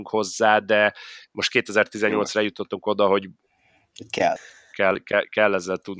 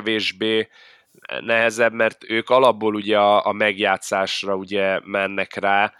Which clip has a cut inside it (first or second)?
first